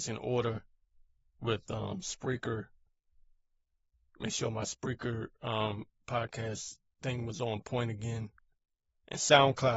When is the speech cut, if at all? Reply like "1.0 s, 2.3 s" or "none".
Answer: none